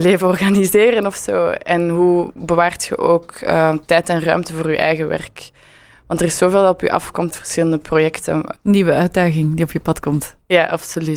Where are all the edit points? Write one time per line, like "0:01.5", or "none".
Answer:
0:07.3
0:08.6